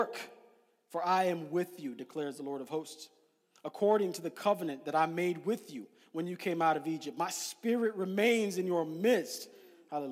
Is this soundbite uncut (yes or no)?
yes